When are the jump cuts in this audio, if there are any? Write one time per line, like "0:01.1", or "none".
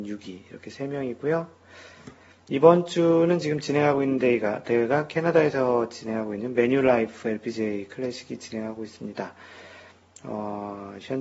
none